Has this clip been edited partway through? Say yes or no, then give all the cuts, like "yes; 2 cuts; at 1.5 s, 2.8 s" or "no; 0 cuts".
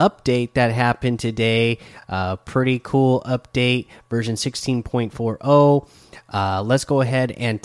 no; 0 cuts